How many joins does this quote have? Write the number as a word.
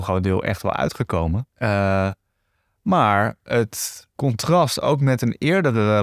two